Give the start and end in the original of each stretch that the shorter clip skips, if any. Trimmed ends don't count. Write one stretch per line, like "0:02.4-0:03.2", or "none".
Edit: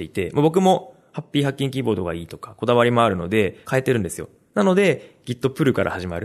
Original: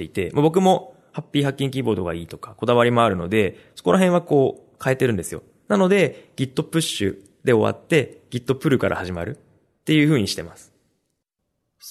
0:03.6-0:04.8
0:06.3-0:08.3